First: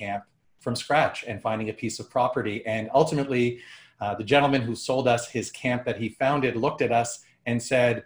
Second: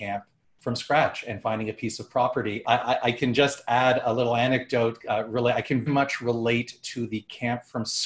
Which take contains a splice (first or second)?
second